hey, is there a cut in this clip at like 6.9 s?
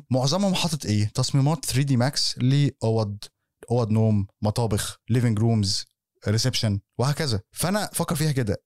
yes; 2 cuts; at 5.0 s, 6.9 s

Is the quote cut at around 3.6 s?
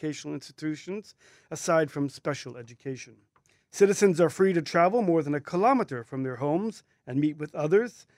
yes; 1 cut; at 3.6 s

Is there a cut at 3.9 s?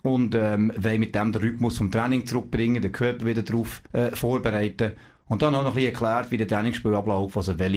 yes; 1 cut; at 3.9 s

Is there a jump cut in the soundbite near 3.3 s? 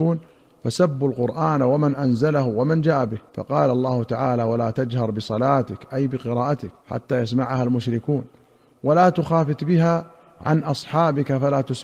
yes; 2 cuts; at 3.3 s, 6.8 s

